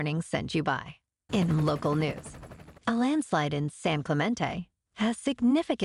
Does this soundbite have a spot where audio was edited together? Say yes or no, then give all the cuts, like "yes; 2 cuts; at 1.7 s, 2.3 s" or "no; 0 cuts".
yes; 2 cuts; at 1.3 s, 2.8 s